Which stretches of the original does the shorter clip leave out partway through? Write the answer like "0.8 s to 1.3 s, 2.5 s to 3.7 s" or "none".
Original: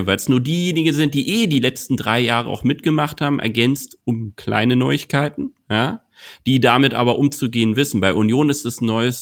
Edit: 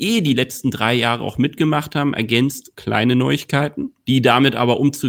4.0 s to 4.3 s, 5.6 s to 6.4 s